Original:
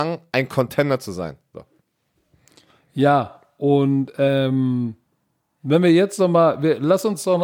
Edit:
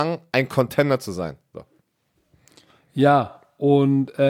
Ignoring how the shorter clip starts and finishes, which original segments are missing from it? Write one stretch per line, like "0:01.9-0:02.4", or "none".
none